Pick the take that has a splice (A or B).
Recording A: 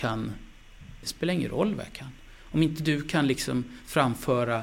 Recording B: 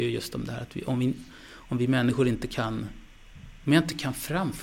A